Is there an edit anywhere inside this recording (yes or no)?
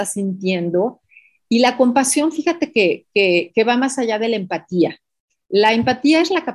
no